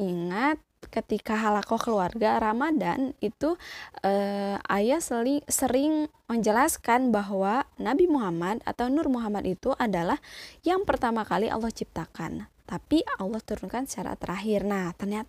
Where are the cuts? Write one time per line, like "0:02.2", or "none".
0:12.6